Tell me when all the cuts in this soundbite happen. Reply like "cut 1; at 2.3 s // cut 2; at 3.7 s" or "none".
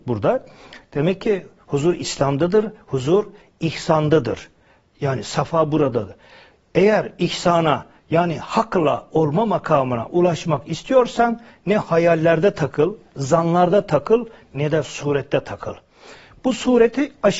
cut 1; at 2.8 s